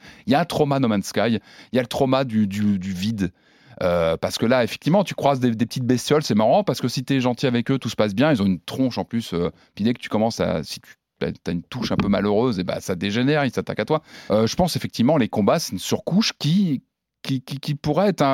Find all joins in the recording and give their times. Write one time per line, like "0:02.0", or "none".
0:14.3